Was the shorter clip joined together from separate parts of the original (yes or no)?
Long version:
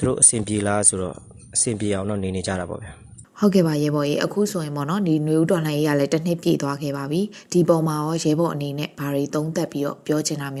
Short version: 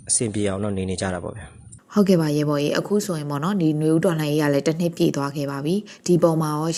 no